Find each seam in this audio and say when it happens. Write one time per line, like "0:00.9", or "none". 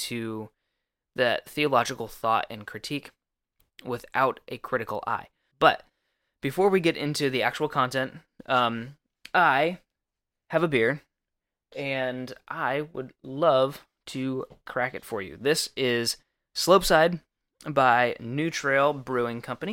0:05.5